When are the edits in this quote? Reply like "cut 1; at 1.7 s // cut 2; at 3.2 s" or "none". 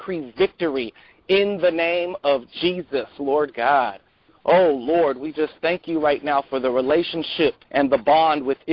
cut 1; at 7.6 s